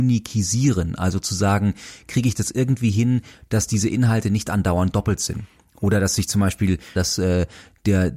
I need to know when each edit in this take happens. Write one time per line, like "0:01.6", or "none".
0:07.0